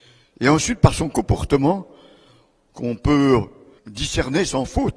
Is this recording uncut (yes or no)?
no